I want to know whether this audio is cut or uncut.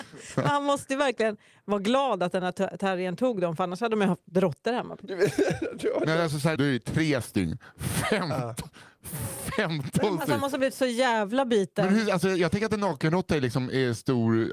cut